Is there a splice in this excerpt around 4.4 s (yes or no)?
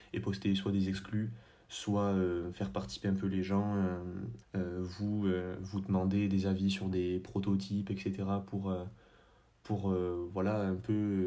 yes